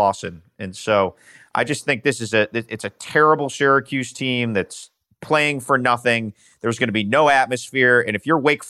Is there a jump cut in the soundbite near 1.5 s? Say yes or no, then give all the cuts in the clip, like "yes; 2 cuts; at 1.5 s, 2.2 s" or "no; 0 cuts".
no; 0 cuts